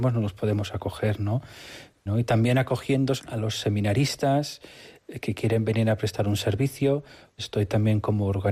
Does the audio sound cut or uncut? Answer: cut